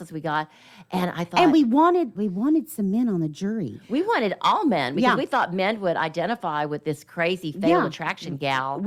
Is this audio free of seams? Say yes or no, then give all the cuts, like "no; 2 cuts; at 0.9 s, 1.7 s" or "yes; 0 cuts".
no; 1 cut; at 2.2 s